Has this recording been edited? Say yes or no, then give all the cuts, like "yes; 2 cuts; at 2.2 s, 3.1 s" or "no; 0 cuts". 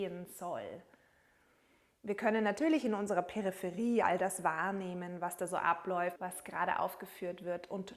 yes; 1 cut; at 6.2 s